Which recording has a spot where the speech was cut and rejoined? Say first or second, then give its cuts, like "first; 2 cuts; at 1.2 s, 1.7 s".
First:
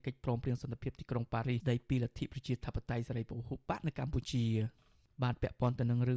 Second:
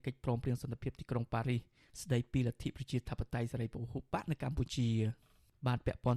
first; 1 cut; at 1.6 s